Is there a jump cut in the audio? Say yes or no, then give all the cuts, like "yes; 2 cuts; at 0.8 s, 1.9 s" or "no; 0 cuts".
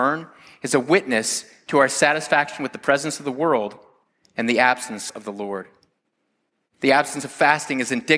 no; 0 cuts